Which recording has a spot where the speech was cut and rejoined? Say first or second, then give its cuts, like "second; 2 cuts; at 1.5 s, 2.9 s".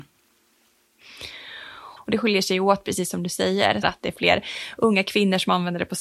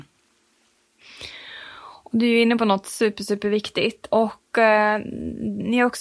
first; 2 cuts; at 2.0 s, 3.8 s